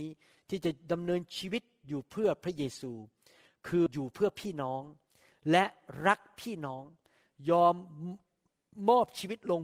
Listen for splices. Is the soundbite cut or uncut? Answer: cut